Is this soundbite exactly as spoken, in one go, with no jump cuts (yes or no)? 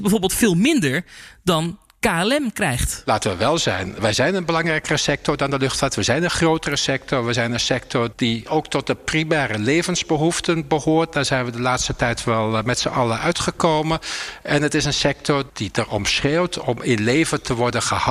yes